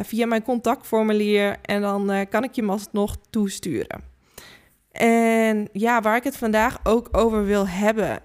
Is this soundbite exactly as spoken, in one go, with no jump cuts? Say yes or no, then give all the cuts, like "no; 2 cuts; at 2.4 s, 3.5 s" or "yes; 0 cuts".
yes; 0 cuts